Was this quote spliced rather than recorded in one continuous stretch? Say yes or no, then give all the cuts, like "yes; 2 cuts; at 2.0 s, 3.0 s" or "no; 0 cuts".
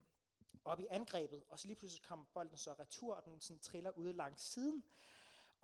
no; 0 cuts